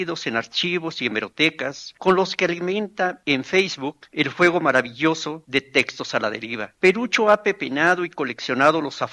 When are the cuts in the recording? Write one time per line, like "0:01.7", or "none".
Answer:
0:06.8